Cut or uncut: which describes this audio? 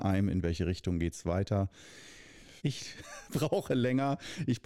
cut